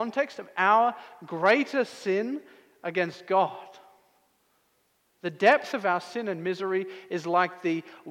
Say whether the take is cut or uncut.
uncut